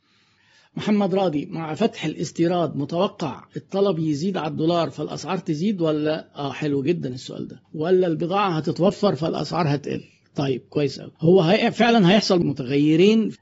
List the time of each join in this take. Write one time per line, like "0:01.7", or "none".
0:07.6
0:11.2